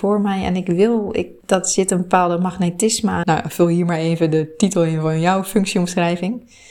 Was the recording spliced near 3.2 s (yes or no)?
yes